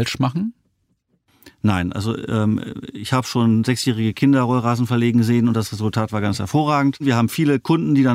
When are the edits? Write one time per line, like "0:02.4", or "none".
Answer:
none